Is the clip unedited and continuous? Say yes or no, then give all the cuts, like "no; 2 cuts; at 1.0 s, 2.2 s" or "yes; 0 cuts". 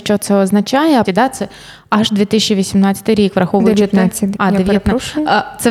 no; 2 cuts; at 1.0 s, 4.3 s